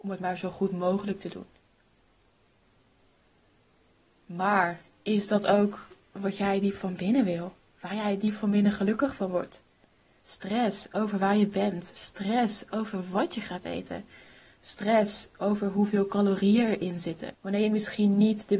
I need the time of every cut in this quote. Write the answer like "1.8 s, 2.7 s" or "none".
10.2 s, 17.3 s